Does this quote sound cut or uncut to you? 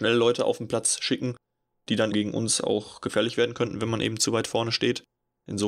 cut